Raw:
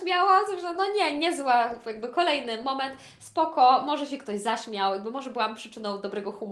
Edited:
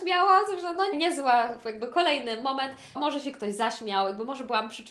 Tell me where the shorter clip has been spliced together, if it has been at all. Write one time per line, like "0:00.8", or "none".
0:00.9
0:02.9